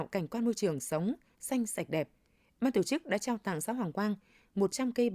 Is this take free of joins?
yes; 0 cuts

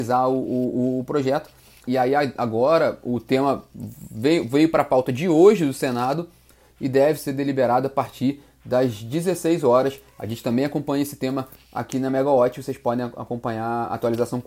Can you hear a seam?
yes; 1 cut; at 1.8 s

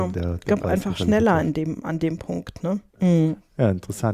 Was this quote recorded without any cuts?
no; 1 cut; at 2.9 s

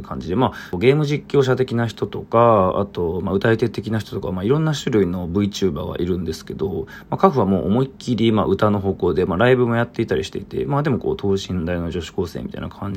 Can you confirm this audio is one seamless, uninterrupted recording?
yes; 0 cuts

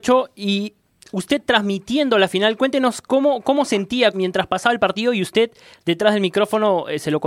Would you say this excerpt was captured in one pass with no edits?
no; 1 cut; at 4.1 s

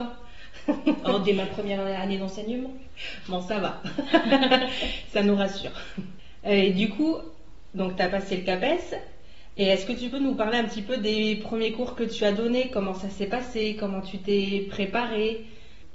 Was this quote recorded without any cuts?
yes; 0 cuts

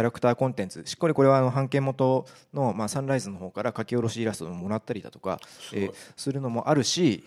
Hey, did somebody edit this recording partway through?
no; 0 cuts

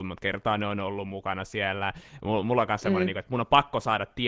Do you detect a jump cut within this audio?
no; 0 cuts

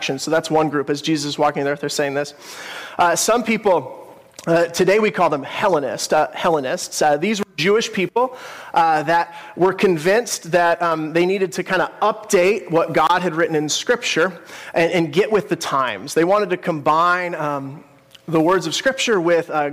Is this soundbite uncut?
yes; 0 cuts

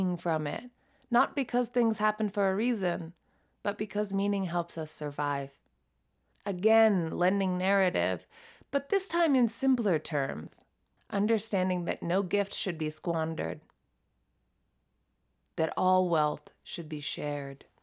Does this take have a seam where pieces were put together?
yes; 2 cuts; at 6.3 s, 11.0 s

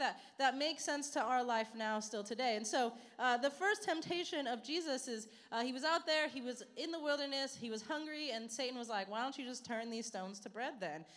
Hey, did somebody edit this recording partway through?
no; 0 cuts

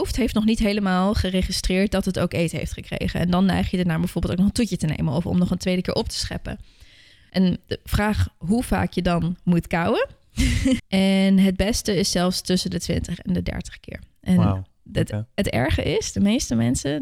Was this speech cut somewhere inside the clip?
yes; 1 cut; at 10.8 s

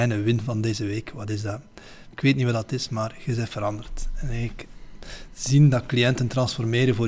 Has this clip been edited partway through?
yes; 1 cut; at 2.1 s

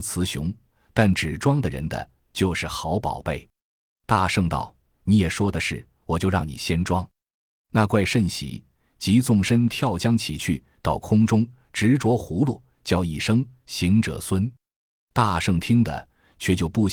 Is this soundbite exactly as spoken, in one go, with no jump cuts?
yes; 0 cuts

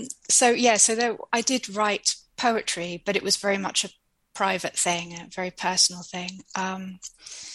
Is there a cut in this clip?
no; 0 cuts

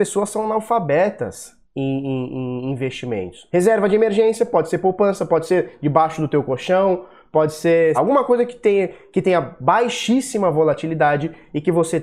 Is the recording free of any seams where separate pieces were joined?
no; 2 cuts; at 3.5 s, 7.9 s

